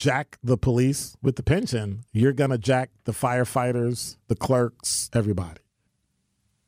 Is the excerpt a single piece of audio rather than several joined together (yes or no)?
no